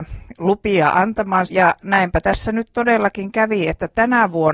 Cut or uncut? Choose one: cut